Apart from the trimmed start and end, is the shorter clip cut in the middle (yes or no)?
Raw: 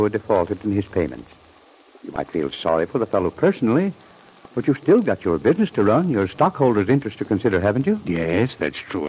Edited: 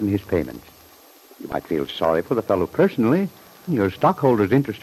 yes